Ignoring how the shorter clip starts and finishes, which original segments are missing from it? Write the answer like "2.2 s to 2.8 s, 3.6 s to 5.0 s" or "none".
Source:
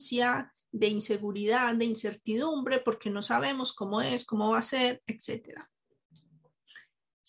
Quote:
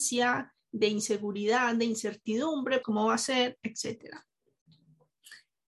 2.8 s to 4.3 s